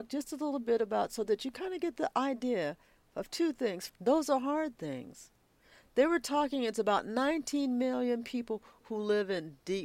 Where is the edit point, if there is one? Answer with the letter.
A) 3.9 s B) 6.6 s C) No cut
A